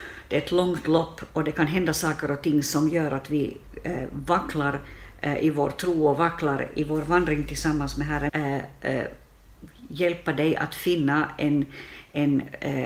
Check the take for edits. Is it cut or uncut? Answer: cut